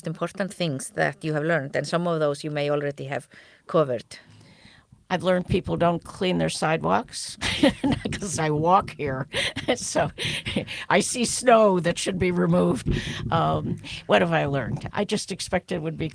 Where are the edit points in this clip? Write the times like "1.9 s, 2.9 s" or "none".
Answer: 14.9 s